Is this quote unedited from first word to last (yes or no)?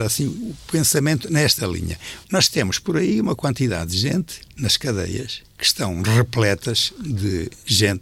no